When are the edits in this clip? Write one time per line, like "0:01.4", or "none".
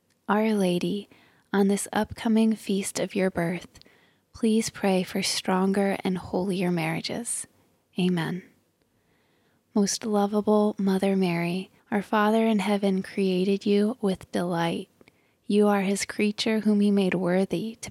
0:11.8